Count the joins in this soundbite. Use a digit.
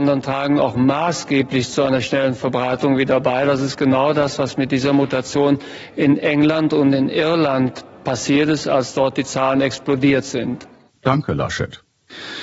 1